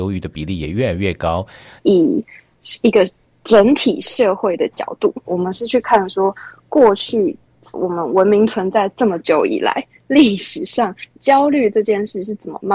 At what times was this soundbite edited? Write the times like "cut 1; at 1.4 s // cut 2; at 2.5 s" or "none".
cut 1; at 1.8 s // cut 2; at 5.2 s // cut 3; at 7.7 s